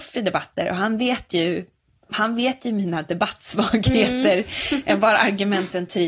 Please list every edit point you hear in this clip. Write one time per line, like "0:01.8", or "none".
0:02.1